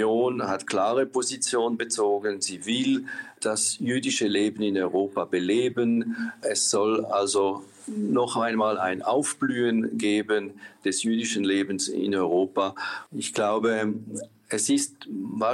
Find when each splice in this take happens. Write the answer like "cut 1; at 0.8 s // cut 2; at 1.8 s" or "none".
cut 1; at 13.1 s